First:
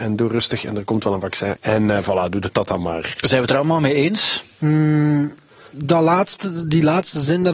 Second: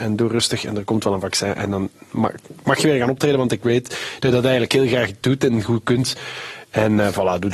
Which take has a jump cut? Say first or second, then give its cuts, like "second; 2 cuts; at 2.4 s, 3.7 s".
first; 1 cut; at 1.6 s